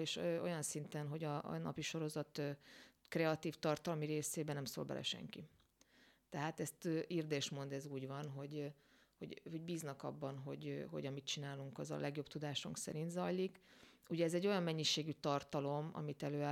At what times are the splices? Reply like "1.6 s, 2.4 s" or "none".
none

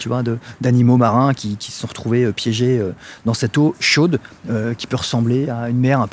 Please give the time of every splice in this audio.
4.4 s

